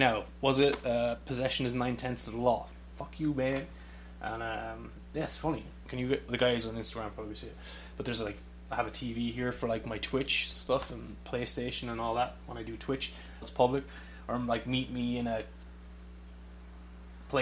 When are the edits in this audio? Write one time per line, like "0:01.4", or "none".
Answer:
0:05.8
0:13.4